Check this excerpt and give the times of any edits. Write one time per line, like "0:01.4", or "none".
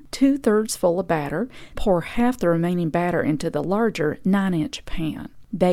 0:01.7